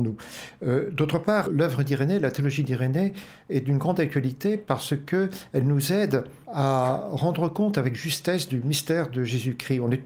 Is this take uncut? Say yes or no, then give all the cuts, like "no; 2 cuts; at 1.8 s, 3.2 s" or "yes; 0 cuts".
no; 2 cuts; at 1.5 s, 6.4 s